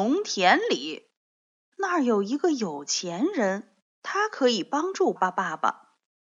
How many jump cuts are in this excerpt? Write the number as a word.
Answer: two